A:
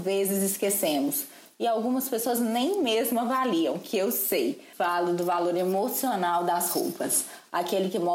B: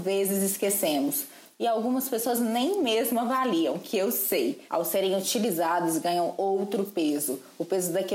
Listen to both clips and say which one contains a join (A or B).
B